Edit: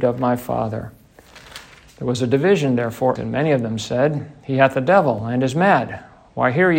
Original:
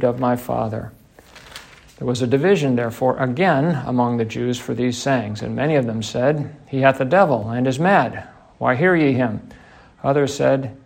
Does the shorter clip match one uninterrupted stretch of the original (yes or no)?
no